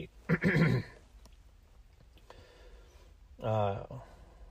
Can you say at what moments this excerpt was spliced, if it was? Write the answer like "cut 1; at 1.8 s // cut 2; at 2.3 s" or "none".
none